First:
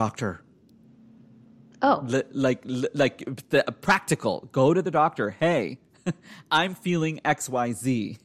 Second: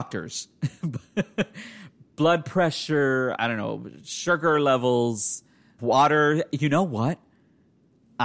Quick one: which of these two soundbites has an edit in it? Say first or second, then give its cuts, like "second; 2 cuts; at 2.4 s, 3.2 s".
second; 2 cuts; at 3.4 s, 5.8 s